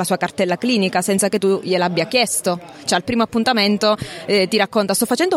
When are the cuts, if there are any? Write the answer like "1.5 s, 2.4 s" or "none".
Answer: none